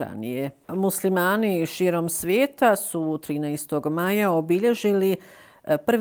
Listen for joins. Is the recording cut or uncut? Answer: uncut